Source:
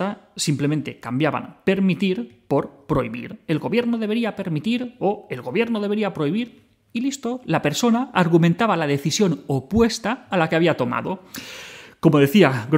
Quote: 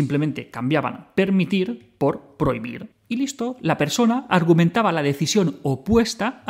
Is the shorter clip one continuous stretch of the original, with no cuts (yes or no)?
no